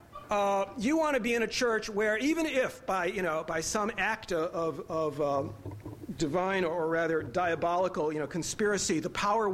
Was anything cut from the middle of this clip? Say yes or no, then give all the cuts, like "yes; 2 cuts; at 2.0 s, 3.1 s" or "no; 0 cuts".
no; 0 cuts